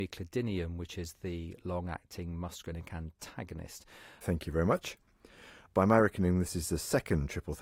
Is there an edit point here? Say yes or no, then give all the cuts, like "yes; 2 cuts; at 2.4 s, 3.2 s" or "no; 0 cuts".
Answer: yes; 2 cuts; at 4.2 s, 5.7 s